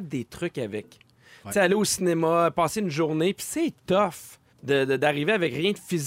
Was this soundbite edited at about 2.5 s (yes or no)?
no